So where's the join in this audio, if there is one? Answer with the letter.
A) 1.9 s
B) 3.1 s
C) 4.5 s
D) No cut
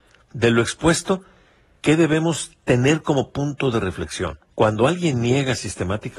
C